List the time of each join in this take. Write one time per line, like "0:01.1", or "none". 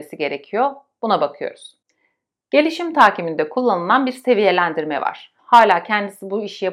0:05.4

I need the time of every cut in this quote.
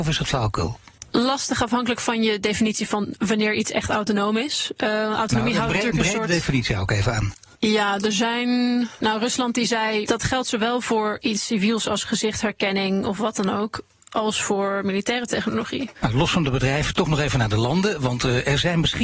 0:10.0
0:15.9

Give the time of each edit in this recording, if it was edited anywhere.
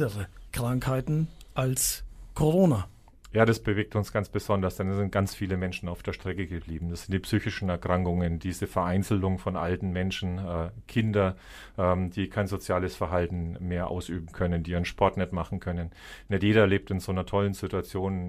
0:13.6

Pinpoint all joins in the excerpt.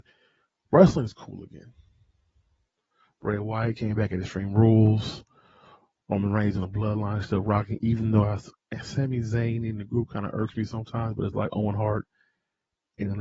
none

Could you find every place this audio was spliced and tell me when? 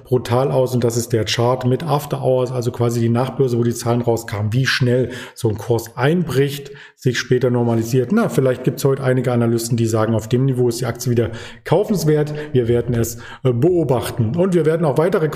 none

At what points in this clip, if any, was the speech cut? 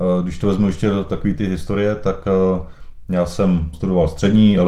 0:03.7

